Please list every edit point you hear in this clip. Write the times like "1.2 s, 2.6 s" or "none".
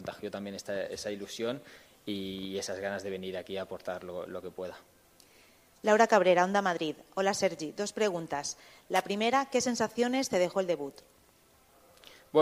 none